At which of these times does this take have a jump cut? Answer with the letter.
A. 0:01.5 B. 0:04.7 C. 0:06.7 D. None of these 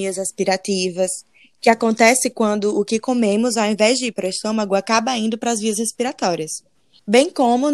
D